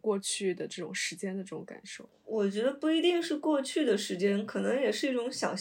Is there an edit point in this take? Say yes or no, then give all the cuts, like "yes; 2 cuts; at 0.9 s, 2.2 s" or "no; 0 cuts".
no; 0 cuts